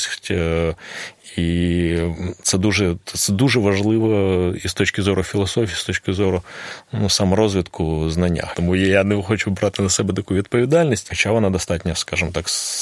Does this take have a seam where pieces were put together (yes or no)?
yes